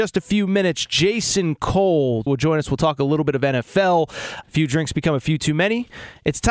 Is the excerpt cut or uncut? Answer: cut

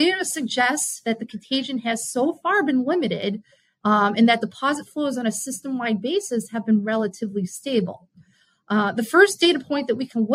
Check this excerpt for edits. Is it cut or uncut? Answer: uncut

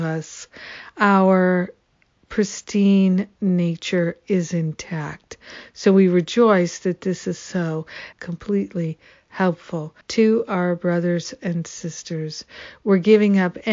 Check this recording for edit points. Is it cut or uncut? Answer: cut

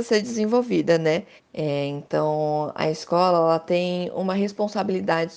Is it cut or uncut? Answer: cut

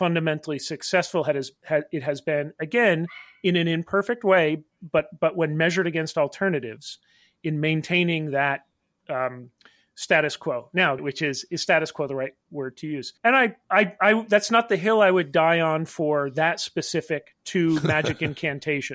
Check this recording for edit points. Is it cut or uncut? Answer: cut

